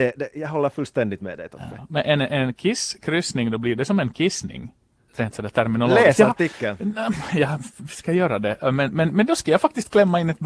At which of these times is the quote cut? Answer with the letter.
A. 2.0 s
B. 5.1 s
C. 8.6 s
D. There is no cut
B